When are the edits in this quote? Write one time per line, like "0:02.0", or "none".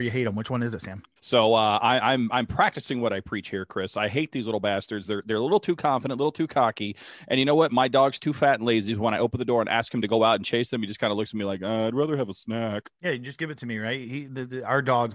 0:01.2
0:12.9